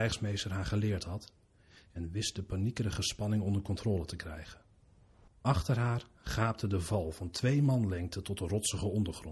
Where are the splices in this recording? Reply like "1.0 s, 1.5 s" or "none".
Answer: 5.3 s